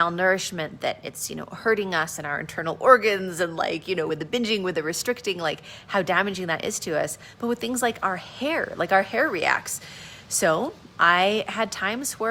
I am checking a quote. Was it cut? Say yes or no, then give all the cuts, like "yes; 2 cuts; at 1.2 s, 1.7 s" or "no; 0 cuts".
no; 0 cuts